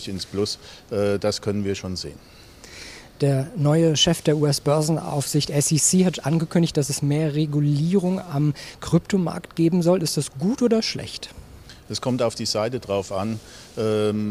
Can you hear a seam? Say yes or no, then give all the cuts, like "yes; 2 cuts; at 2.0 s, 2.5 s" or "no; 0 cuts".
no; 0 cuts